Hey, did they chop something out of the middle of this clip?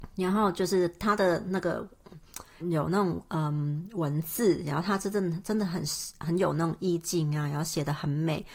yes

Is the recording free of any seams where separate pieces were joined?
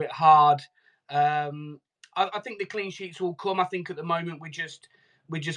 yes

